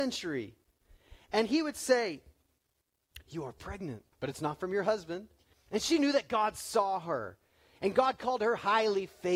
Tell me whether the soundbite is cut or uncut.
cut